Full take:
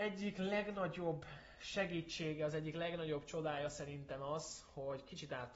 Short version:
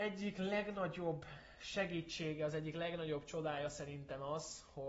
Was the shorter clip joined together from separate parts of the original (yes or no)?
no